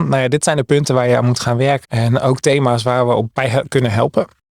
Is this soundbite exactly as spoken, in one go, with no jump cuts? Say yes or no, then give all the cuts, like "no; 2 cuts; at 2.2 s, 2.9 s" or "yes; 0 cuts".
no; 2 cuts; at 1.8 s, 3.3 s